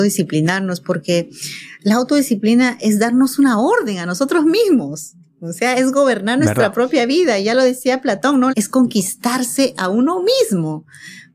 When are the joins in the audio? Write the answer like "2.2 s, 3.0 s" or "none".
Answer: 8.5 s